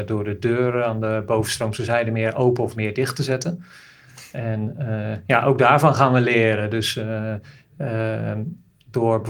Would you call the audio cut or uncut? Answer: uncut